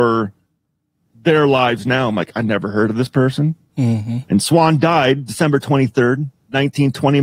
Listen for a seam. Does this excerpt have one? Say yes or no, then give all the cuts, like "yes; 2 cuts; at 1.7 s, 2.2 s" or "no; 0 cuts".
yes; 1 cut; at 3.7 s